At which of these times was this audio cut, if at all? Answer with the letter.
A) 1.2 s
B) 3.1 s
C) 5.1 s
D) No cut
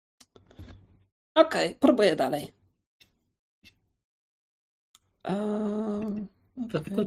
D